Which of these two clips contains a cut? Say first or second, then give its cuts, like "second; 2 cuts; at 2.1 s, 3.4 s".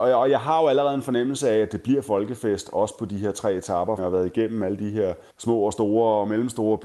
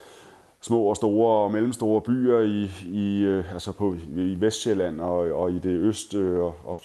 first; 2 cuts; at 4.0 s, 5.3 s